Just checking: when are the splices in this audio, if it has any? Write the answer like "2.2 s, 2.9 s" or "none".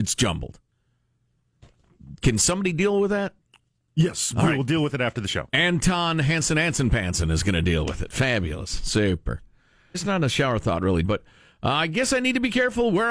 9.9 s, 11.0 s